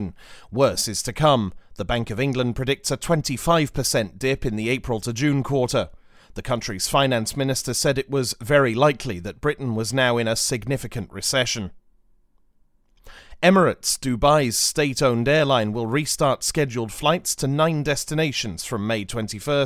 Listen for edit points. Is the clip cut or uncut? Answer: uncut